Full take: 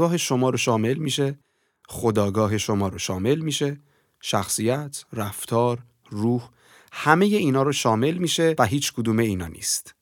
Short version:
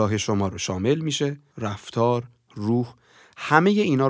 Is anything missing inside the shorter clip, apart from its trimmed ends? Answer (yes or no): yes